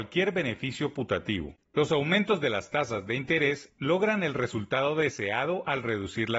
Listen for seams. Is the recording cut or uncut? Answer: uncut